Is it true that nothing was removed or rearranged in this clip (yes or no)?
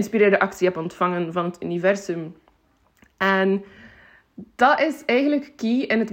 yes